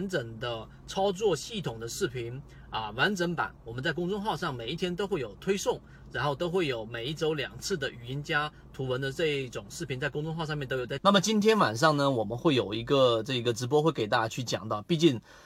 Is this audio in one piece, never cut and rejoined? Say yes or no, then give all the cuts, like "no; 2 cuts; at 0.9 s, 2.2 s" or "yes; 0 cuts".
yes; 0 cuts